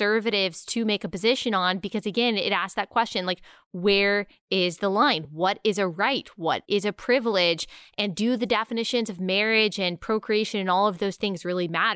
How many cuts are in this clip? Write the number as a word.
zero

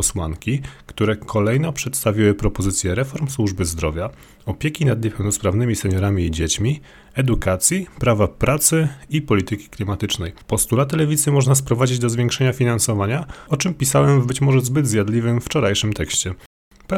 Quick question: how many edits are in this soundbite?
two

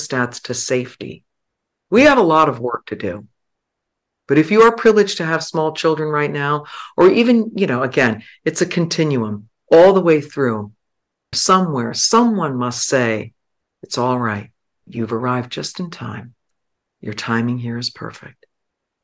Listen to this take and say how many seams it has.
two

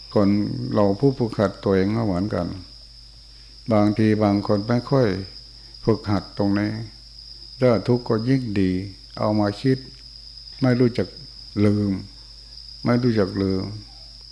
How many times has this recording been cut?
zero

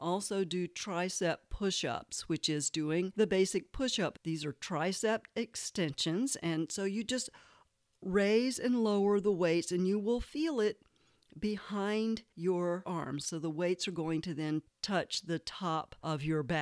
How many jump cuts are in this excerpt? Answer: two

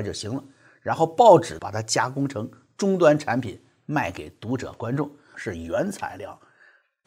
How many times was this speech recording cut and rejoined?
two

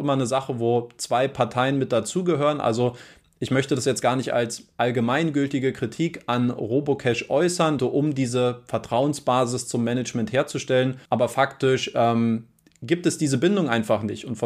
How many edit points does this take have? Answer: two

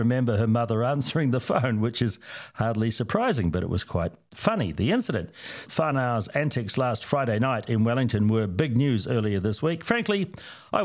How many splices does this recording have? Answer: one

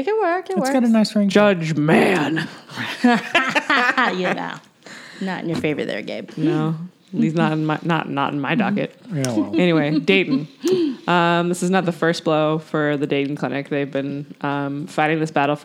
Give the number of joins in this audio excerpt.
zero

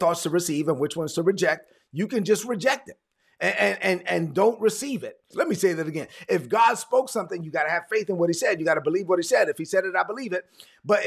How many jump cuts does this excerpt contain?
one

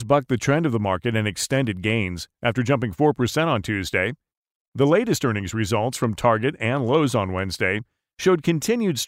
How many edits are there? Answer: one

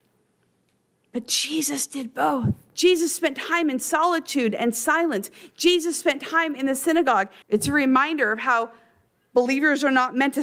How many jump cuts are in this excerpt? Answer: two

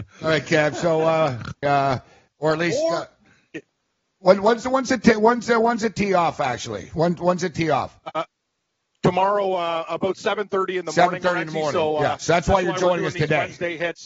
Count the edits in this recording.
one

